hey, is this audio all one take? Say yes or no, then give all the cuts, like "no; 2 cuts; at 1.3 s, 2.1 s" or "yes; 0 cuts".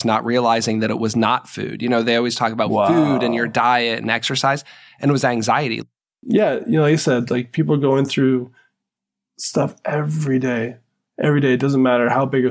yes; 0 cuts